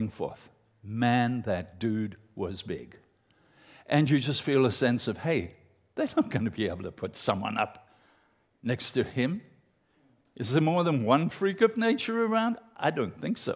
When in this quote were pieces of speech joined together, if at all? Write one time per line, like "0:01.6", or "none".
none